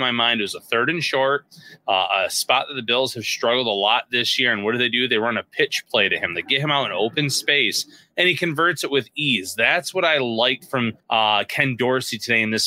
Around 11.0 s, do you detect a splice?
yes; 1 cut; at 11.0 s

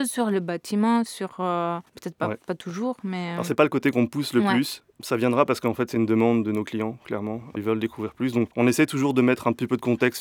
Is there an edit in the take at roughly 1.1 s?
yes; 1 cut; at 1.1 s

